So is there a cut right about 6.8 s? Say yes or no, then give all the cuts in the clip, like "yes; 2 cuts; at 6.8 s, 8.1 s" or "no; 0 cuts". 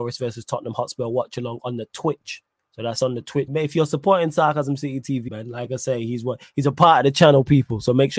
no; 2 cuts; at 3.5 s, 5.3 s